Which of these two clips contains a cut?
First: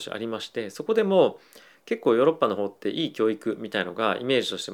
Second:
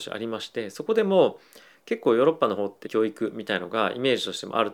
second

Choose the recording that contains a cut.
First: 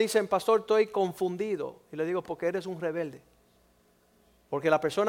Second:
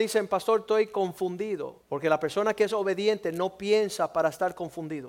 second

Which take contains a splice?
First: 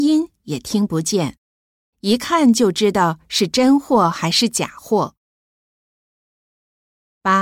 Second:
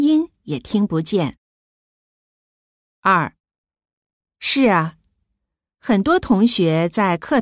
first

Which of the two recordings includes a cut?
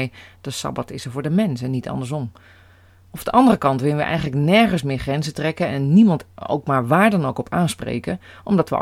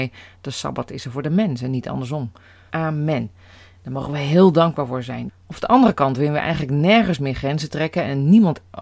second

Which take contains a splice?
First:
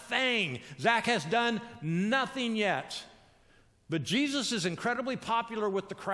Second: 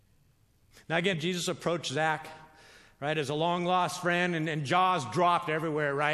second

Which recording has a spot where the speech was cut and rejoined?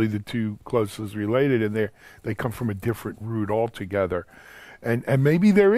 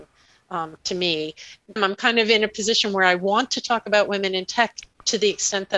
second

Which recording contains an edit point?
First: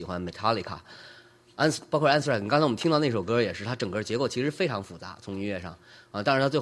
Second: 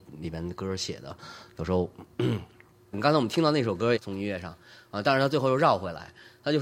second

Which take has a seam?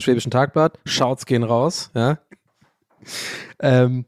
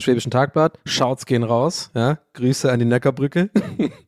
first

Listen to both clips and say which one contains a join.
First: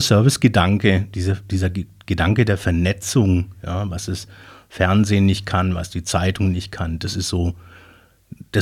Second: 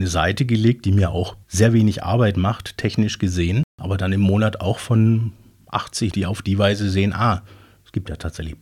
second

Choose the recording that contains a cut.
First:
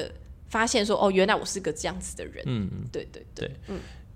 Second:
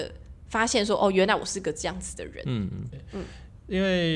second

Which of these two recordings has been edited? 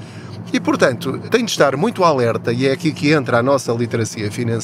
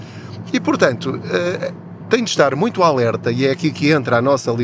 first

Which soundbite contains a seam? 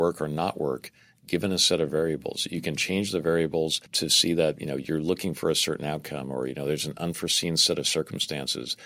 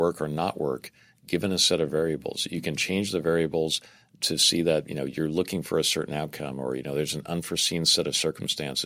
first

